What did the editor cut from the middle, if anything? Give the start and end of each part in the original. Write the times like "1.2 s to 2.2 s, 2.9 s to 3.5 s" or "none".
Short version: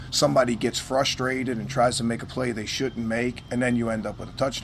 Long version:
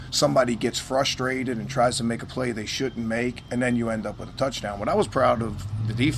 none